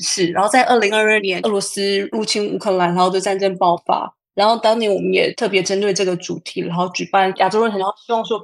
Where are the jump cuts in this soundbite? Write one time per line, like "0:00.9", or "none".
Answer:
none